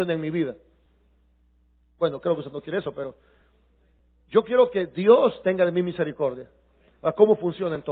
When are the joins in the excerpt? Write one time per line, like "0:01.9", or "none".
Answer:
0:06.9